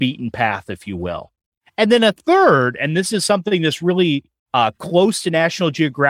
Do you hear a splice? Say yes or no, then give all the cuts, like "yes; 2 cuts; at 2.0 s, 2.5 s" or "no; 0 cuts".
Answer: no; 0 cuts